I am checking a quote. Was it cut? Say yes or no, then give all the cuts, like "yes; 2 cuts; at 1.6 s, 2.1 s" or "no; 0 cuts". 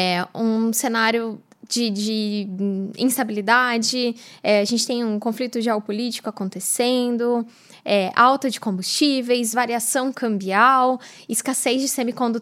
no; 0 cuts